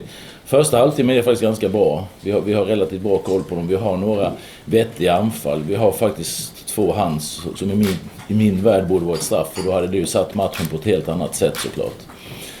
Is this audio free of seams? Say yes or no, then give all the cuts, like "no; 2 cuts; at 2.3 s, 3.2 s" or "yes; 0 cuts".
no; 1 cut; at 7.6 s